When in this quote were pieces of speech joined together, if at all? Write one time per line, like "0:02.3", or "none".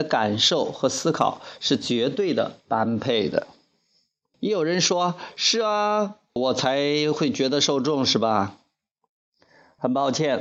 0:04.3
0:06.4